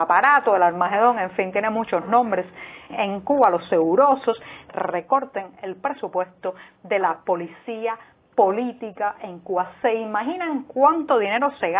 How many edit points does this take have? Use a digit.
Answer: 2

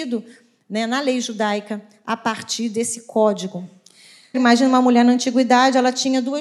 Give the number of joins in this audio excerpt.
1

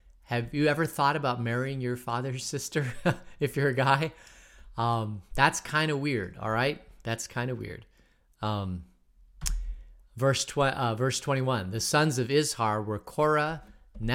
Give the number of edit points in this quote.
0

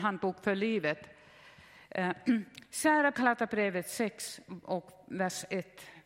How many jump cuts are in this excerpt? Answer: 1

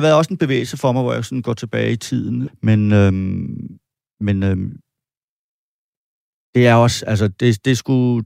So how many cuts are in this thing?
1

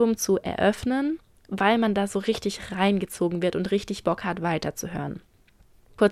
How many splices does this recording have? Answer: 0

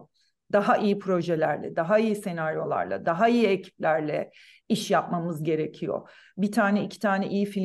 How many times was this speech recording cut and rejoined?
0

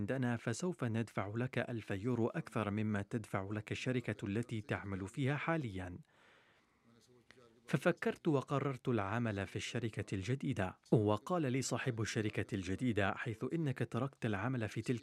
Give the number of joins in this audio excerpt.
1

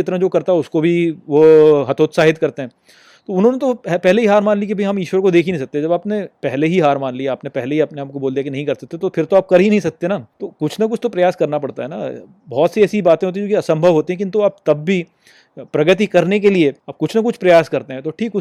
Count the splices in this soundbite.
2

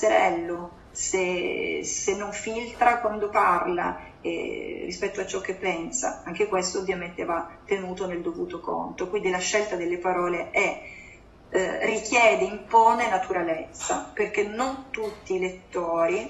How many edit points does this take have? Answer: 0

